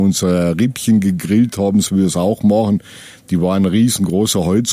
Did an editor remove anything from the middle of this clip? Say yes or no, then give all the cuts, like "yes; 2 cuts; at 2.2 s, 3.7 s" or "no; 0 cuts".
no; 0 cuts